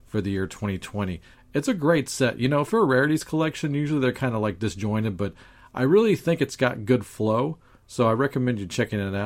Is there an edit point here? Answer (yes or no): yes